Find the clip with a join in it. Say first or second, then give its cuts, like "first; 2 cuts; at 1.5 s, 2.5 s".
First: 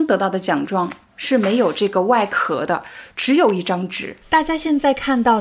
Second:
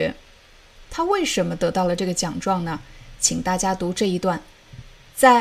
first; 1 cut; at 4.2 s